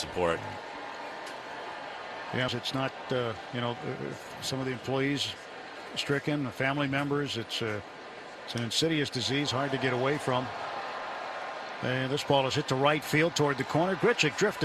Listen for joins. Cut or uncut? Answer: cut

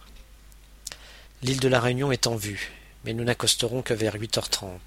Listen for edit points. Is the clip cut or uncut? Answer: cut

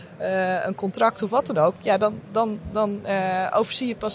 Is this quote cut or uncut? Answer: uncut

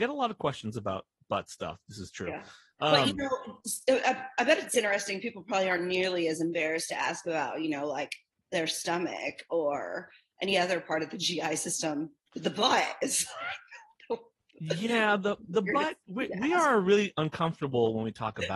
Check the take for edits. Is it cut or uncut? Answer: uncut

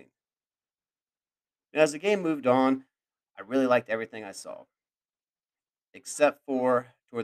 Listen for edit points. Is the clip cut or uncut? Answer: uncut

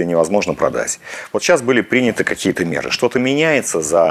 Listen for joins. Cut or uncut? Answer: uncut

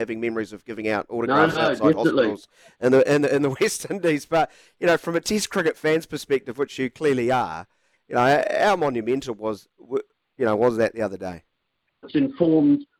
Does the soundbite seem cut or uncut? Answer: cut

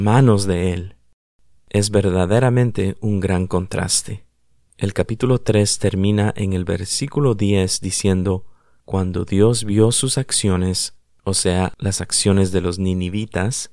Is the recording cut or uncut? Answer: cut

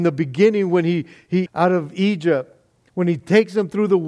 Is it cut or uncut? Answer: cut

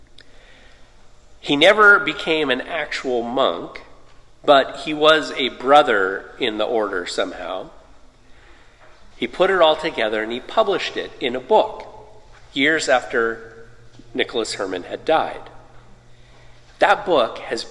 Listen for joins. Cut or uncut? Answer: cut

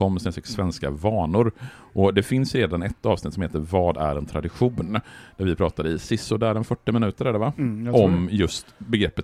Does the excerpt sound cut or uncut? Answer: uncut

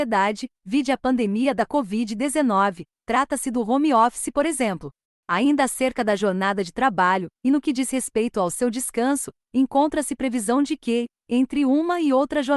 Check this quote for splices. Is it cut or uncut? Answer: uncut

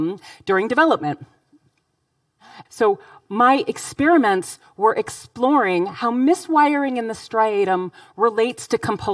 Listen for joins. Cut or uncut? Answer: cut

